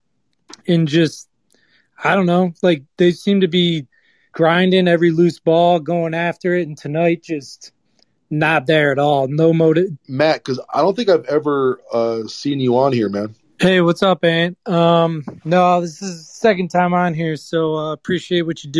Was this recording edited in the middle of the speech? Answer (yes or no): yes